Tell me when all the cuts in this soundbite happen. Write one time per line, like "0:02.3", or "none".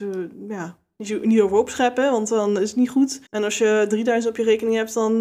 0:03.3